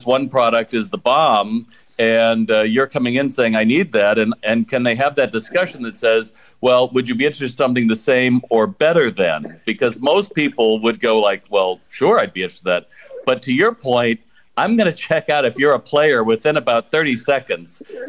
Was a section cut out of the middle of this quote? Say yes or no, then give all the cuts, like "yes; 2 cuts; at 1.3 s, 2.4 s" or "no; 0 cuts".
no; 0 cuts